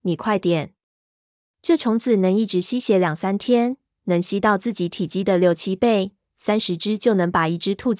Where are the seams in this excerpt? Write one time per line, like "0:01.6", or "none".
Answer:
none